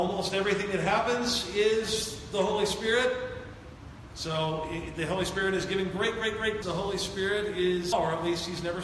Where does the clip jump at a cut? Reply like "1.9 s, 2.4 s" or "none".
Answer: 6.6 s, 7.9 s

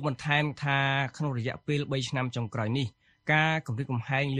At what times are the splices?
none

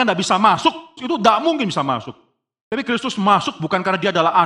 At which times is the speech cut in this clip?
1.0 s

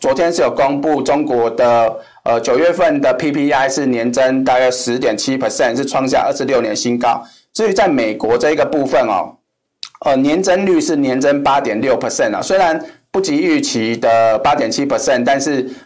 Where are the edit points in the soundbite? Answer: none

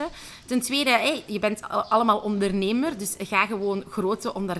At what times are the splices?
1.3 s

